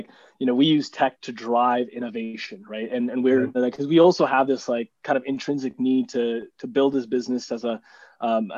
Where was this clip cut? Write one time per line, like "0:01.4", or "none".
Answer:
0:03.5